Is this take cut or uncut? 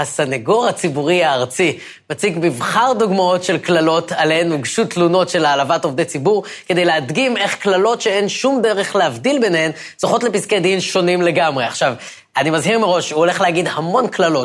uncut